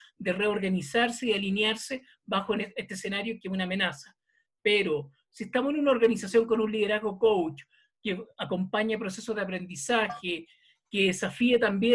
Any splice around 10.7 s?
no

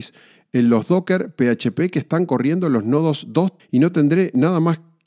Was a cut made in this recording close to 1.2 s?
no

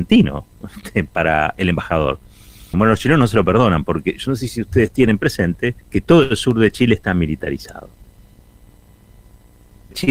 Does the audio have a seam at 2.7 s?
yes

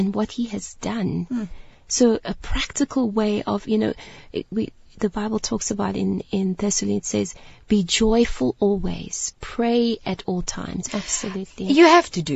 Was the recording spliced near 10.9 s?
yes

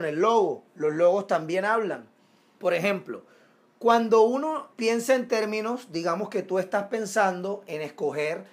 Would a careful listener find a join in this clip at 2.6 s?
yes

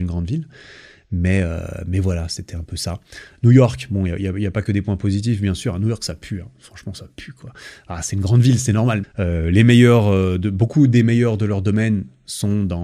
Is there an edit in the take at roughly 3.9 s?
no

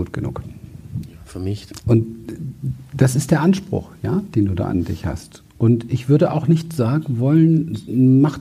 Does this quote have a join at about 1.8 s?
yes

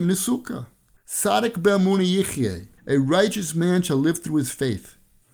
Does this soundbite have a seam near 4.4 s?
no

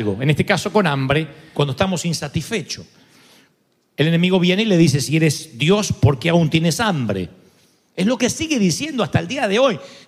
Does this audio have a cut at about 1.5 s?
yes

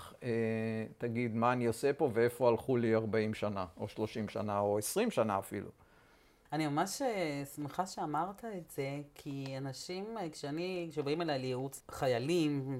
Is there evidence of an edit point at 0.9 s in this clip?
no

